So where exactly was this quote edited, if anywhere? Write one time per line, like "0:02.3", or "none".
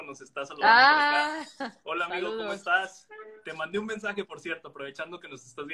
none